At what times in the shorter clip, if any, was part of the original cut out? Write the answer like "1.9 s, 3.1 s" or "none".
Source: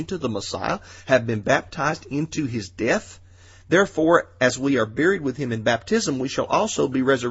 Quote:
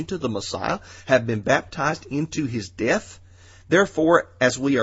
none